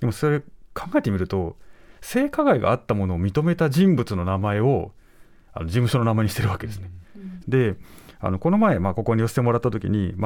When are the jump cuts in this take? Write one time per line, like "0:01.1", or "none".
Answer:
0:07.4